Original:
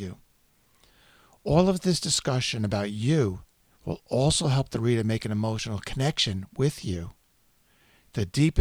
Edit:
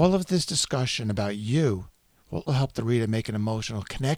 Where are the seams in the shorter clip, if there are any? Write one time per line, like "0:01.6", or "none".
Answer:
0:02.5